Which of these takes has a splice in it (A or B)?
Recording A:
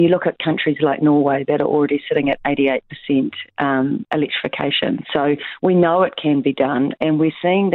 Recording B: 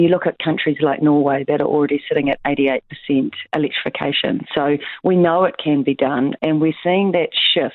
B